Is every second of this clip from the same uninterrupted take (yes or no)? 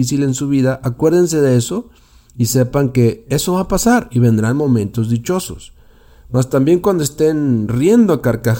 yes